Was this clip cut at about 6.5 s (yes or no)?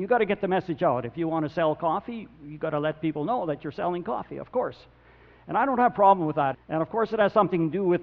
yes